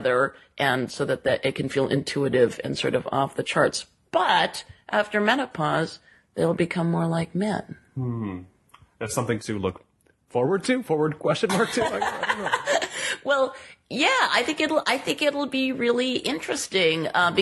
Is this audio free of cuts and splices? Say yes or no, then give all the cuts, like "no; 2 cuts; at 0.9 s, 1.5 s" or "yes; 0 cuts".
yes; 0 cuts